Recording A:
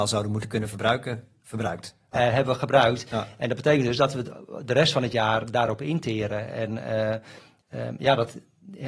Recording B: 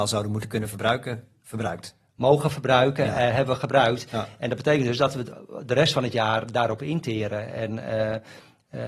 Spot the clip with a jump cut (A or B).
A